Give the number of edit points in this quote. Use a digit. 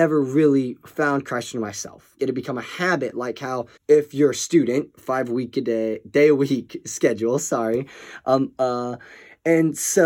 3